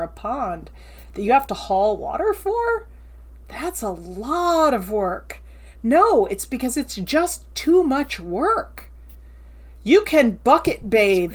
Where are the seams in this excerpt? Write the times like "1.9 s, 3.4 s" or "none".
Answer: 5.7 s